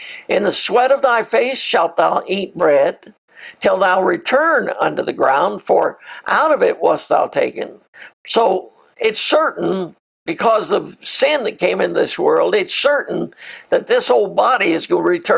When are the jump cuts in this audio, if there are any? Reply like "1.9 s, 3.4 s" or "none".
8.1 s